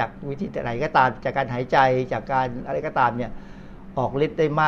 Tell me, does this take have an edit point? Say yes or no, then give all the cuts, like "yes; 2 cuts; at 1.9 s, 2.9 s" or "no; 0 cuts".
no; 0 cuts